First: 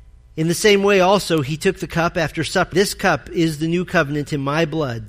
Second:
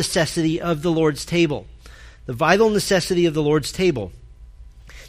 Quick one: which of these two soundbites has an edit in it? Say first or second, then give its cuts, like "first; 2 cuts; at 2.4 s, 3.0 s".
first; 1 cut; at 2.7 s